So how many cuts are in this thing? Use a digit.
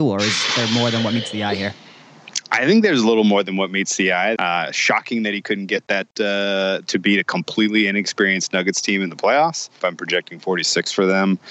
3